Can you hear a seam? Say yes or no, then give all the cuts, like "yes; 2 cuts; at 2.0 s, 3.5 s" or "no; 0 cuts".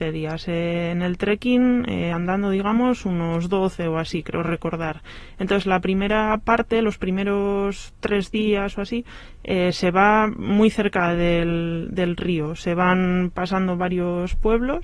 no; 0 cuts